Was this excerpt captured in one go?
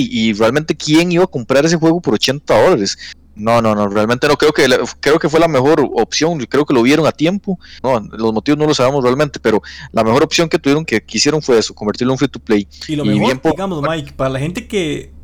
no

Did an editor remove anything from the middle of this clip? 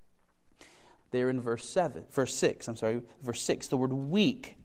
yes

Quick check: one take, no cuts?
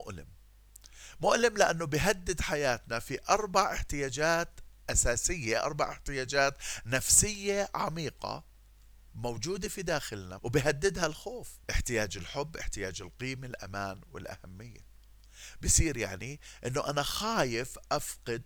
no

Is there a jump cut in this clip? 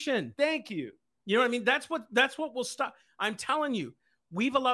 no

